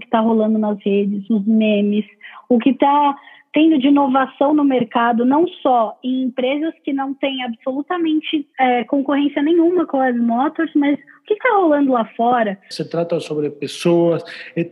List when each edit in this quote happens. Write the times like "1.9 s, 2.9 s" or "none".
8.5 s, 12.7 s